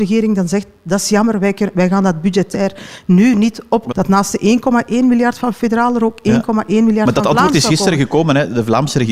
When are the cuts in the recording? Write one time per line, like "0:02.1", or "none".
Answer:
0:03.9

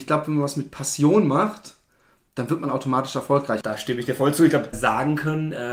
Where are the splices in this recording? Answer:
0:03.6
0:04.7

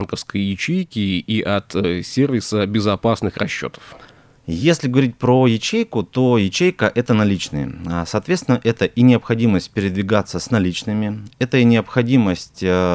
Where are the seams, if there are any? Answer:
none

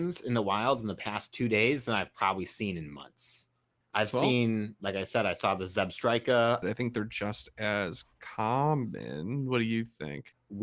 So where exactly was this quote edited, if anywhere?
0:03.8
0:06.6

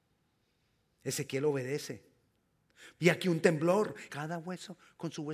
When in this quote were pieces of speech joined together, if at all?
0:03.0
0:04.1

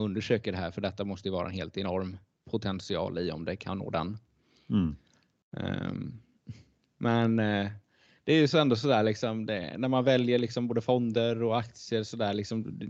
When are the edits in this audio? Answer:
none

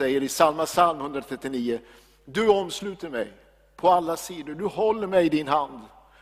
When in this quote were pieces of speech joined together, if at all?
none

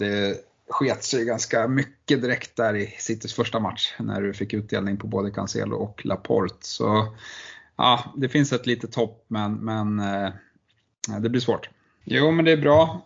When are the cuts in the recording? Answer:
0:12.0

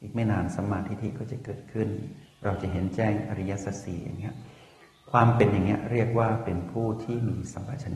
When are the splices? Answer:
none

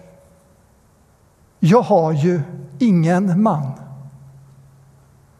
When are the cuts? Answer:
none

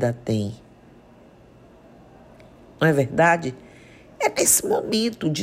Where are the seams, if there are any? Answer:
none

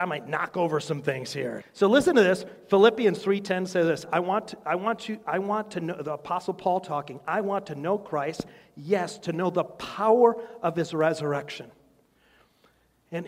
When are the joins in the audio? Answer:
0:01.6

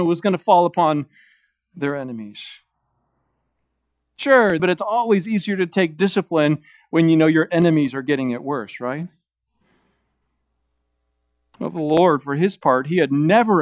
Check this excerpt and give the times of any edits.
0:04.6

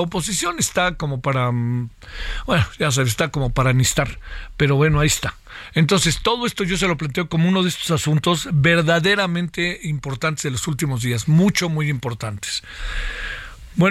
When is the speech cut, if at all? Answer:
none

